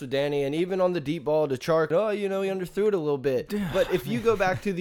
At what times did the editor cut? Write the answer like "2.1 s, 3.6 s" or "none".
1.9 s